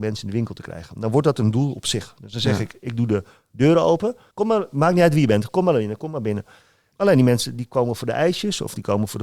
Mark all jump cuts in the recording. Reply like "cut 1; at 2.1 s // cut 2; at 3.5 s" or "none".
cut 1; at 4.3 s // cut 2; at 6.9 s

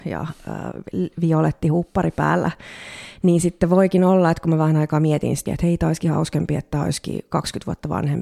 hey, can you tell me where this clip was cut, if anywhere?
cut 1; at 5.5 s

